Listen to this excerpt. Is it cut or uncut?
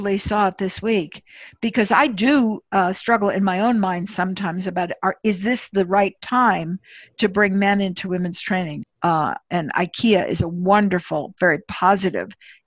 cut